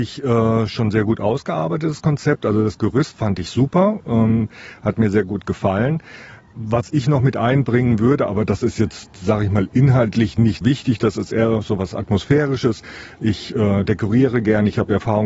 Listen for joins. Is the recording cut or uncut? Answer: cut